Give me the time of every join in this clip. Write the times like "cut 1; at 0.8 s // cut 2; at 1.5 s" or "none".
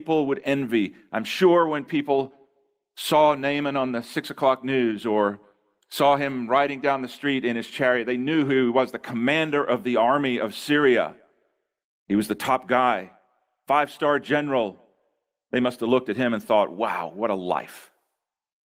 none

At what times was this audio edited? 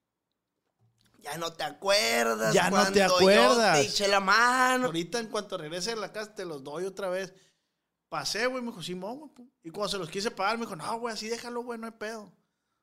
cut 1; at 4.8 s

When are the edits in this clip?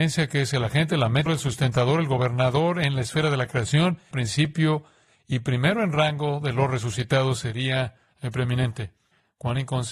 cut 1; at 1.3 s // cut 2; at 4.1 s

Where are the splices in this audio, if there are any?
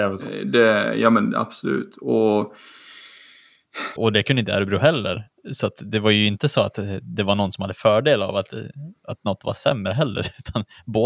cut 1; at 4.0 s

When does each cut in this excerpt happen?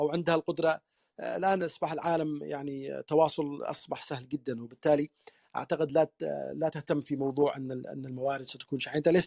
none

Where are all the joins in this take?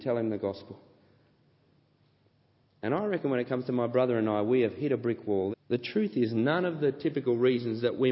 cut 1; at 5.5 s

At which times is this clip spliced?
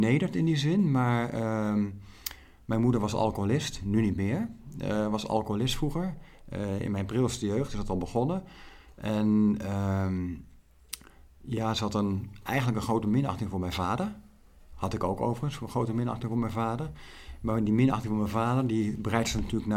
none

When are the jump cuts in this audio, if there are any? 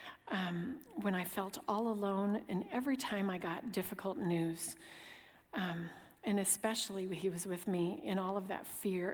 none

